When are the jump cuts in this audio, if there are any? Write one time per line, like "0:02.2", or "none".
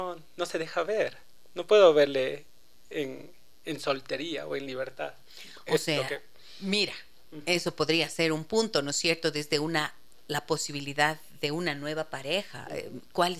none